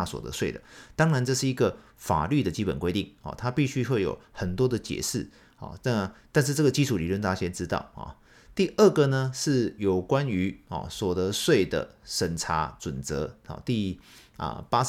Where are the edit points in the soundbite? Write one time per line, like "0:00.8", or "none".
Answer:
none